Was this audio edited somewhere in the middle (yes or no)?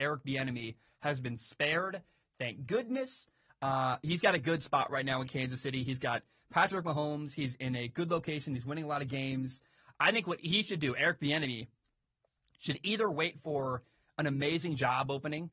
no